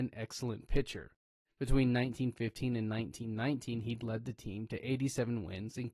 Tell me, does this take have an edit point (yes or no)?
no